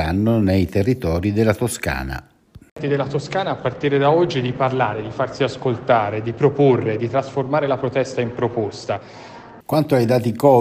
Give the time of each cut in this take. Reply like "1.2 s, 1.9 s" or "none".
9.6 s